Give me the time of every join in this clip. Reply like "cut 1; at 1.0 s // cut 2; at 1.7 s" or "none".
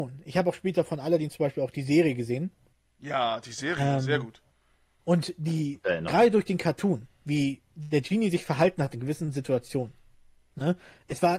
none